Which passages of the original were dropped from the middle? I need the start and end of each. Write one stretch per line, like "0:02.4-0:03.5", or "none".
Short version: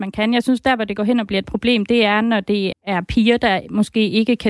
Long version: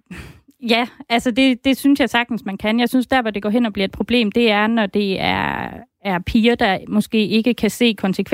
0:05.2-0:05.9

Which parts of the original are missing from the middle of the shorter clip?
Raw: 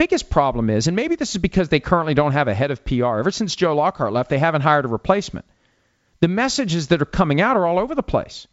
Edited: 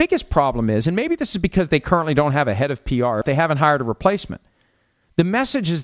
0:03.2-0:04.3

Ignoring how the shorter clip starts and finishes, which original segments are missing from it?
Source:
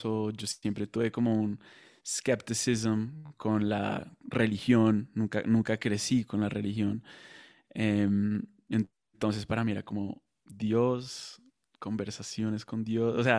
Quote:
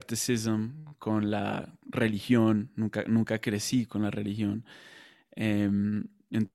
none

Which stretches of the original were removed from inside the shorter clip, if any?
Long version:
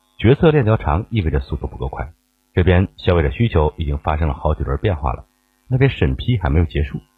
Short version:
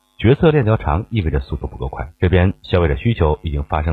0:02.2-0:02.5

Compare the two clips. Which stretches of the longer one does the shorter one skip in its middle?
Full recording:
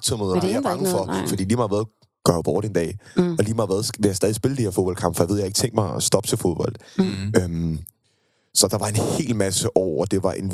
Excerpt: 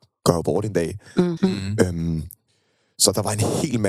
0:03.4-0:06.9

